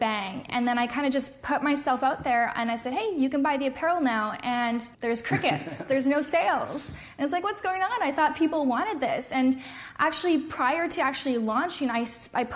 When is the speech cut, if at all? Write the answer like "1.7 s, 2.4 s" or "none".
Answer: 4.9 s